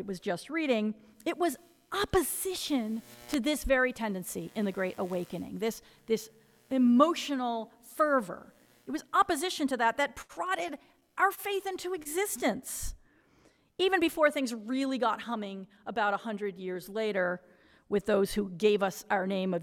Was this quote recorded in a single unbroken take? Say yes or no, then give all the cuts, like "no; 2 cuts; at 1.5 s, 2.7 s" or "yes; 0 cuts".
yes; 0 cuts